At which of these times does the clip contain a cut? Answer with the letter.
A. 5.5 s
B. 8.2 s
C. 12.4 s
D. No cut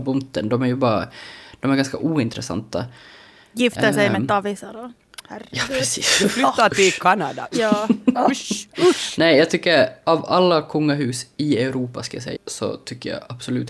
C